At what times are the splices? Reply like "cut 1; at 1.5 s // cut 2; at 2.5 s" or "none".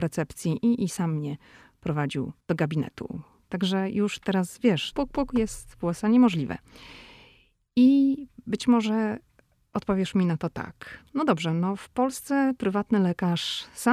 cut 1; at 2.4 s // cut 2; at 4.9 s

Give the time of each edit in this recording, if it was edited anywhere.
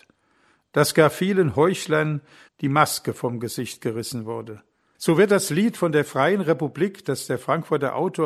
cut 1; at 2.5 s // cut 2; at 4.9 s

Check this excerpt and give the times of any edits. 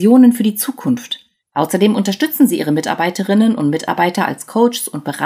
cut 1; at 1.4 s

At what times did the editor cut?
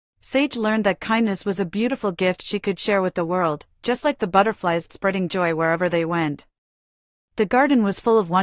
none

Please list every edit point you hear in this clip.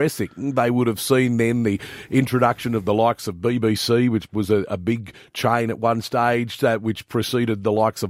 none

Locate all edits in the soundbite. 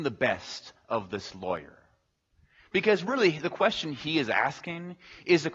none

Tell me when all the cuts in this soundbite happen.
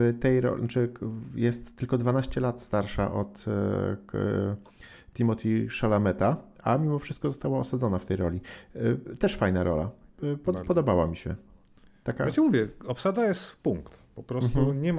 none

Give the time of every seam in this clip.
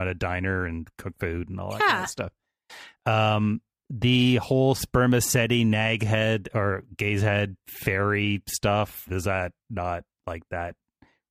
cut 1; at 9.1 s

